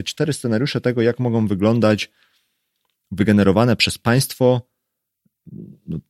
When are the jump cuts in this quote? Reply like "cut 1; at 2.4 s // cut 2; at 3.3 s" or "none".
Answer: none